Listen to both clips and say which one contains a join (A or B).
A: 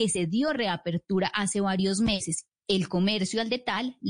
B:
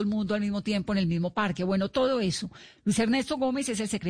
A